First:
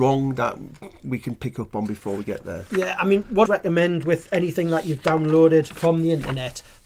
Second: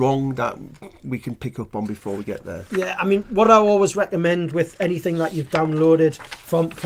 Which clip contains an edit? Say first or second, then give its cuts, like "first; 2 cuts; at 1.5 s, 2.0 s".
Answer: first; 2 cuts; at 3.5 s, 5.7 s